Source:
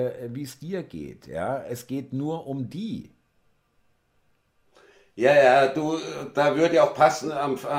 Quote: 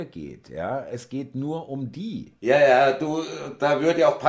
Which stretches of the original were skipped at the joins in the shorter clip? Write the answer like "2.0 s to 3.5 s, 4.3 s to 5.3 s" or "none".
3.1 s to 5.1 s